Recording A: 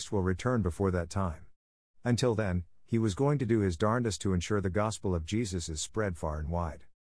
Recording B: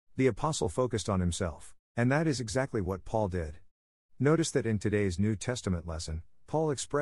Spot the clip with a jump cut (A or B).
B